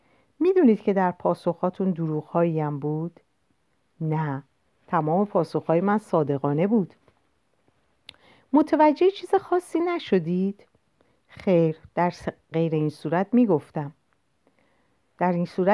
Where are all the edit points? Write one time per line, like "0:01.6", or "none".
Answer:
none